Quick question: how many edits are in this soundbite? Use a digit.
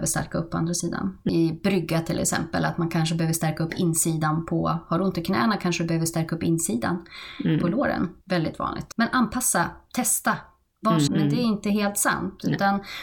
2